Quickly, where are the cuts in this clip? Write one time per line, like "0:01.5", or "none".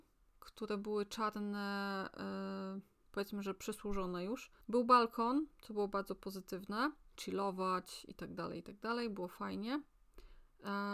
0:04.6
0:07.2